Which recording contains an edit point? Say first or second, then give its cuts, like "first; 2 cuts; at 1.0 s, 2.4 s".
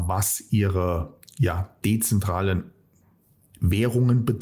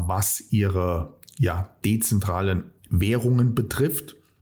second; 1 cut; at 2.8 s